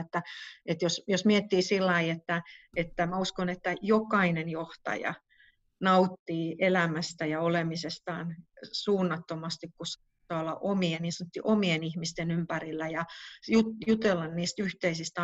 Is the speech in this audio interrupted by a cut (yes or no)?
no